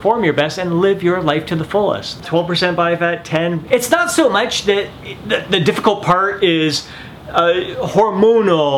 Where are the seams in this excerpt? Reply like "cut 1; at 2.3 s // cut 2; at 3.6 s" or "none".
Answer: cut 1; at 2.2 s // cut 2; at 3.7 s